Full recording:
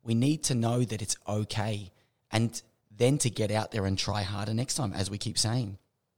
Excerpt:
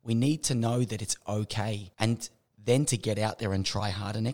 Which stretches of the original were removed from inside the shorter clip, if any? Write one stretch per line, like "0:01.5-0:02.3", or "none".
0:01.9-0:02.3